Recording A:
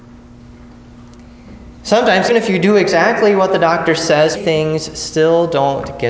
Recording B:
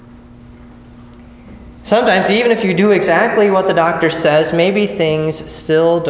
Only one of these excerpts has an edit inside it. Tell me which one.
A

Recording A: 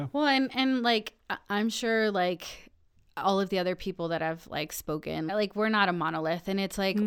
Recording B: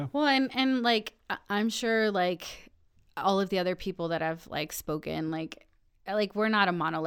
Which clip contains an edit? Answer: A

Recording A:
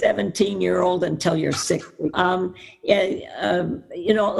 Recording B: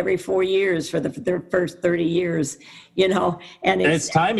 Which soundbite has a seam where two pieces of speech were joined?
A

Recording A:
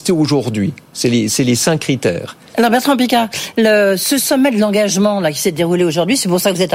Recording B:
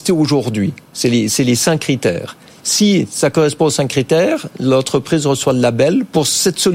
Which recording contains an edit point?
A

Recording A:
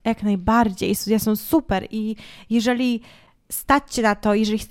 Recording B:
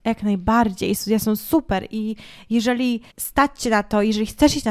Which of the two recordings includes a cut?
B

